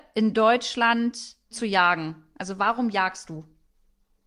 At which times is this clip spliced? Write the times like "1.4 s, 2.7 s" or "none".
1.5 s